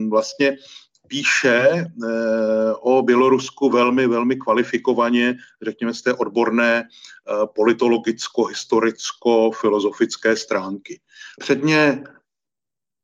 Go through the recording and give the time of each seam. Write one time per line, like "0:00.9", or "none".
0:11.4